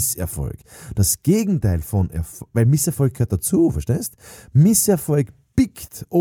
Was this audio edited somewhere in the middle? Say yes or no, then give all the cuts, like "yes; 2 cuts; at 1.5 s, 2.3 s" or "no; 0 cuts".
no; 0 cuts